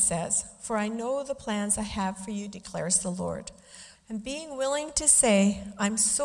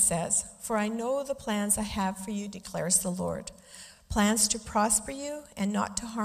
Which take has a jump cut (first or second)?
first